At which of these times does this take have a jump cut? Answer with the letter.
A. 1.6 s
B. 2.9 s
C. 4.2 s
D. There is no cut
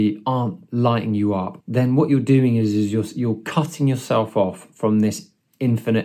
A